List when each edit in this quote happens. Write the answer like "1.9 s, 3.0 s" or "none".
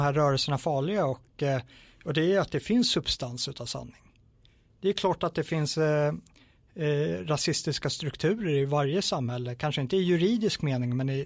none